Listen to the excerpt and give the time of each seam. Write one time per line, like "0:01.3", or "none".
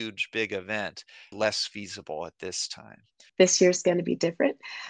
0:01.3
0:03.3